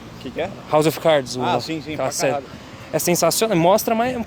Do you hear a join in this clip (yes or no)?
no